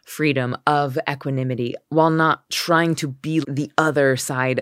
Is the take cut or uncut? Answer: cut